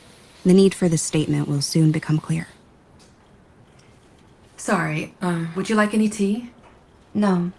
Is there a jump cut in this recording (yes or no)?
yes